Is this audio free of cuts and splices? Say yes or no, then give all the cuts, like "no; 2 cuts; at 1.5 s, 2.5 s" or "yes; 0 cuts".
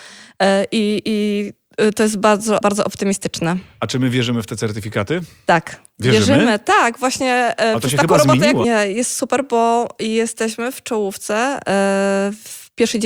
no; 2 cuts; at 2.6 s, 8.6 s